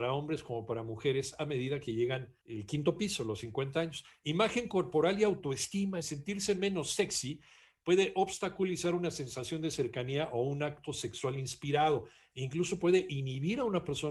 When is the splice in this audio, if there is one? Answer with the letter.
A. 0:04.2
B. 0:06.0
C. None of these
B